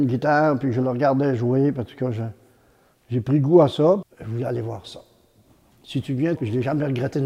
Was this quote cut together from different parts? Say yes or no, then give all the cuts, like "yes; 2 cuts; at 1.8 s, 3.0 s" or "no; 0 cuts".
yes; 2 cuts; at 4.0 s, 6.4 s